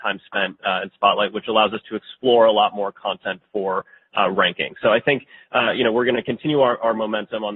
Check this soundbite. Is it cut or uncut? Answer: uncut